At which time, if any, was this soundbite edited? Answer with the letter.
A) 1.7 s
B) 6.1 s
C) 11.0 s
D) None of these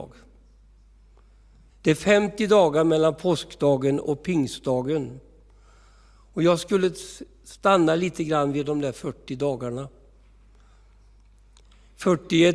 A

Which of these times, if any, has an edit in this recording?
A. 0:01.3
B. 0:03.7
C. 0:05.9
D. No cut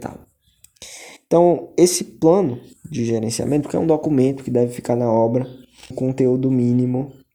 C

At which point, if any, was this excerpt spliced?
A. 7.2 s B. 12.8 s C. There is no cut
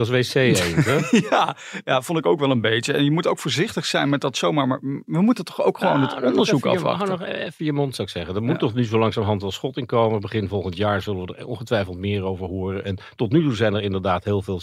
C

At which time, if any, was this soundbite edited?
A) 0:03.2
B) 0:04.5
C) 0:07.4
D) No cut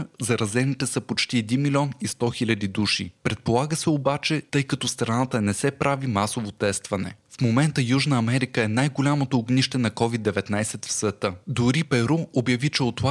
B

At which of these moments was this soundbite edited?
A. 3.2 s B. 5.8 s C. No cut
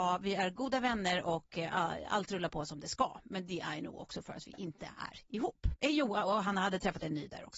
B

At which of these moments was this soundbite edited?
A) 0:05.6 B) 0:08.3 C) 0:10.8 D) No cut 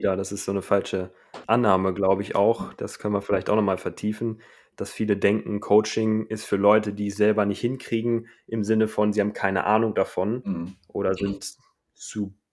D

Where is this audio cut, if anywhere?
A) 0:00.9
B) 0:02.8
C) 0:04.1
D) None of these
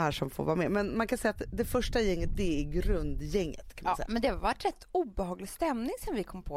C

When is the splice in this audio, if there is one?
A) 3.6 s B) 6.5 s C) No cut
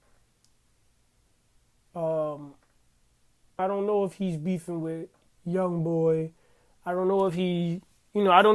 A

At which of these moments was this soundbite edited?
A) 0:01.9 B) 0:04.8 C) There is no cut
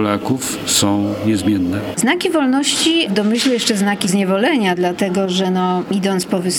A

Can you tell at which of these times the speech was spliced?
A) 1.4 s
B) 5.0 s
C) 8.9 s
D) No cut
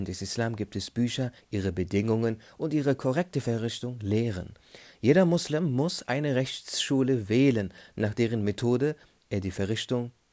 A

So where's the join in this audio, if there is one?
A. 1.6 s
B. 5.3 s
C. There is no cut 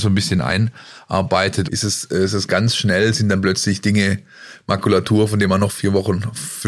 A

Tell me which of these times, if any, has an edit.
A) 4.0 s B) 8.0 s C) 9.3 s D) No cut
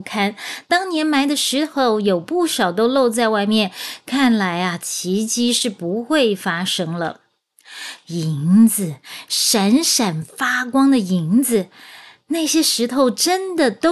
B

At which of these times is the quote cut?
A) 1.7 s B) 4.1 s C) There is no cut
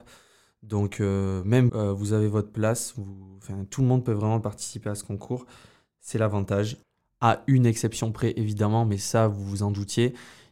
A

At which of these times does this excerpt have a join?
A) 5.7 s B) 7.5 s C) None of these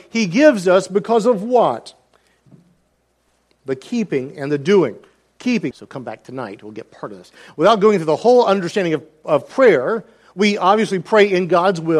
A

